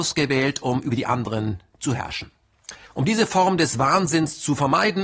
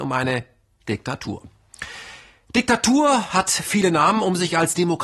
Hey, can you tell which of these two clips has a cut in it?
first; 1 cut; at 2.9 s

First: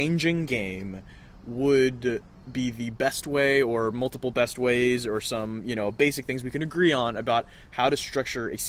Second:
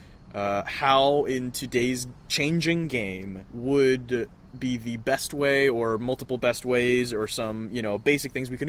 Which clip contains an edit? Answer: second; 1 cut; at 3.5 s

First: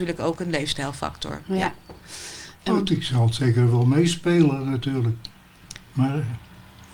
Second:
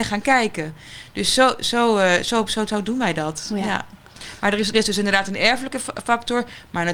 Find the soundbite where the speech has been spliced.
second; 1 cut; at 4.7 s

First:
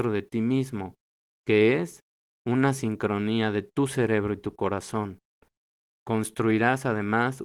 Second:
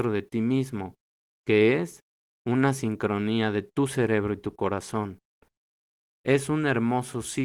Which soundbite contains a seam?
first; 1 cut; at 5.8 s

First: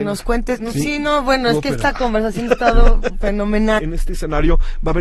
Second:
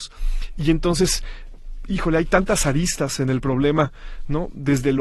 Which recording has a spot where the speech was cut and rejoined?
first; 1 cut; at 3.8 s

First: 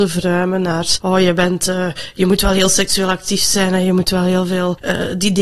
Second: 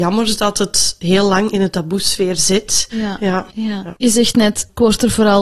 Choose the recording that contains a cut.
second; 1 cut; at 2.9 s

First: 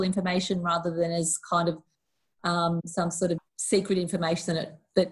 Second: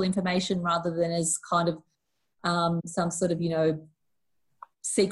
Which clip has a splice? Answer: first; 1 cut; at 3.4 s

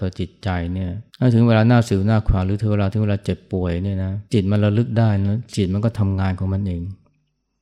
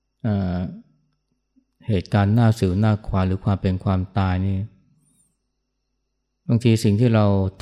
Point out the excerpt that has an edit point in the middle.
first; 2 cuts; at 1.1 s, 4.3 s

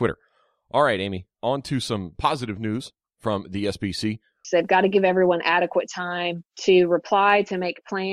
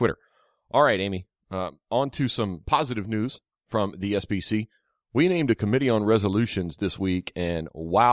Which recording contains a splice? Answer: first; 2 cuts; at 1.3 s, 4.4 s

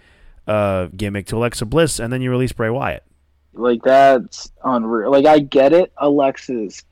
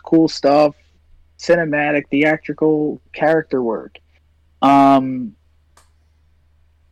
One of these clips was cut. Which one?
first; 1 cut; at 3.5 s

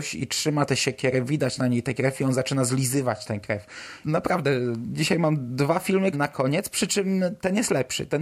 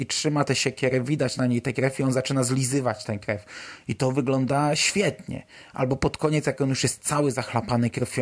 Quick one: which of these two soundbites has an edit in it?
first; 2 cuts; at 4.0 s, 6.1 s

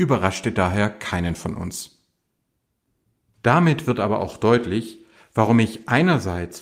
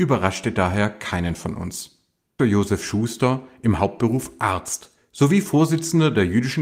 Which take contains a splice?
second; 1 cut; at 2.4 s

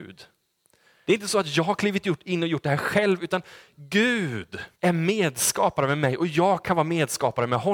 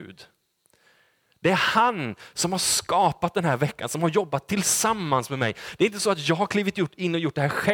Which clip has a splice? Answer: first; 2 cuts; at 1.1 s, 4.7 s

